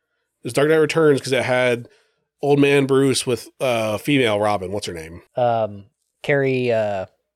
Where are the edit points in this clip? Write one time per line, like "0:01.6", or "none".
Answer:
0:05.3